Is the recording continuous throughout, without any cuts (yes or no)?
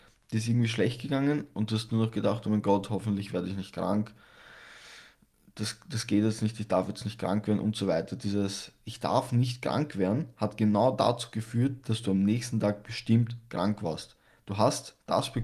yes